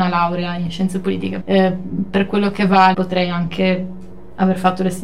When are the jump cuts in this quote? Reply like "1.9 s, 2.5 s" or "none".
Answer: 1.4 s, 2.9 s

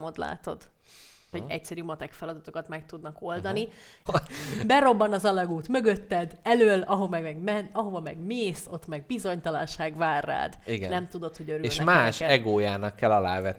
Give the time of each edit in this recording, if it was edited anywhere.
1.3 s, 4.1 s

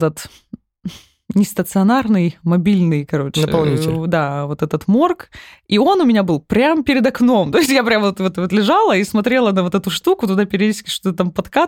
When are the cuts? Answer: none

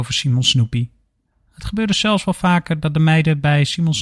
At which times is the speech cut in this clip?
1.3 s

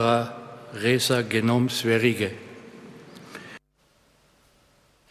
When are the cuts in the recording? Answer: none

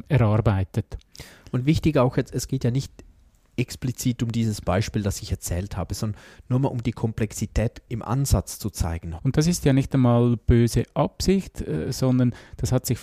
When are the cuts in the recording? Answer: 7.9 s, 9.2 s

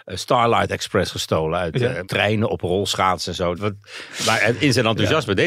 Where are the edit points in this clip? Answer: 2.0 s, 3.6 s

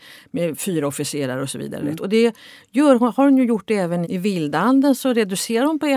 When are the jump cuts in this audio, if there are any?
2.0 s, 4.0 s

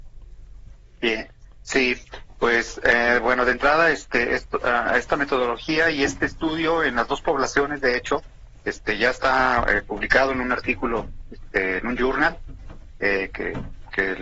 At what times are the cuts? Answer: none

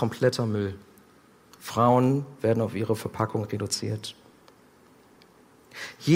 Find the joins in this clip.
none

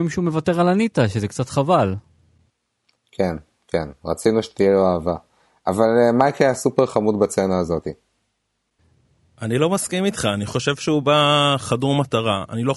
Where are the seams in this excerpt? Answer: none

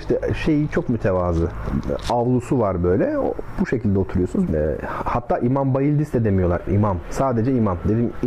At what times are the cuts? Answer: 4.5 s, 6.7 s

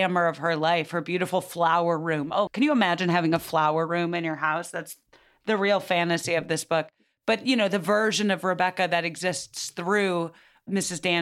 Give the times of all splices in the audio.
2.5 s

